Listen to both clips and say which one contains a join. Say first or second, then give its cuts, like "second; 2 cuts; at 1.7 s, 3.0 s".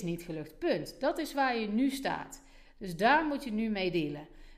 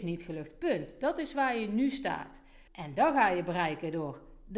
second; 1 cut; at 2.7 s